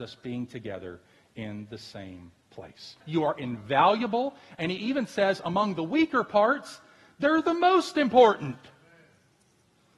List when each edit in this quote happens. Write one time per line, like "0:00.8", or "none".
0:03.0

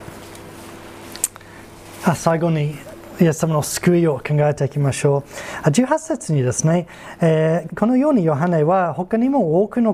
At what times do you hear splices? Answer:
0:07.7

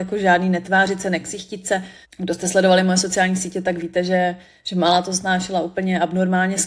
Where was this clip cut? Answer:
0:02.0

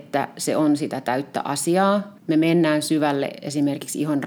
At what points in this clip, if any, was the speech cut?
0:02.2

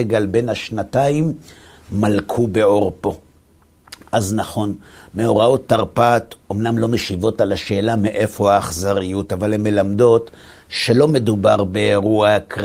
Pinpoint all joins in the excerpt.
none

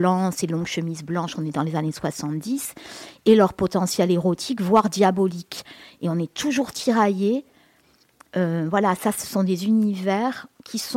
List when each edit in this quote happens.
none

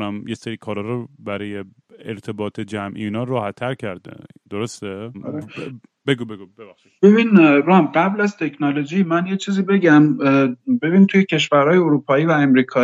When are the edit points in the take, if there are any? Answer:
0:05.1
0:07.0

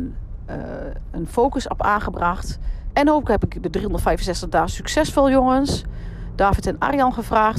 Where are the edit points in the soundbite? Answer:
0:02.9

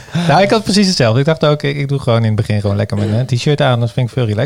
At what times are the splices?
none

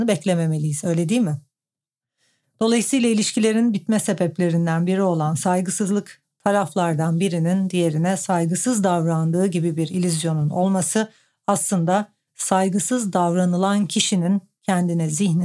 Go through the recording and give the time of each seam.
none

